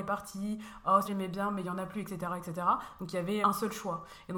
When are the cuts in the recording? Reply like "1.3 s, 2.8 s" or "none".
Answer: 1.0 s, 3.4 s